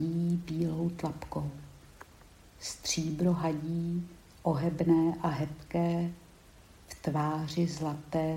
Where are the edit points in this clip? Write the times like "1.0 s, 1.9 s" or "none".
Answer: none